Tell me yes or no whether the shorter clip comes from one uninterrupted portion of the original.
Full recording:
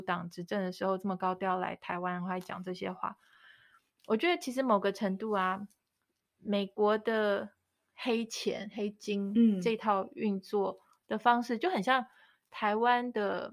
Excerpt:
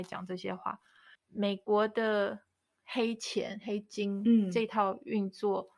no